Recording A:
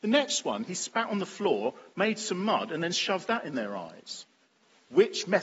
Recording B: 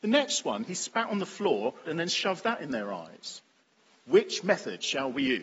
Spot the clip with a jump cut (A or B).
B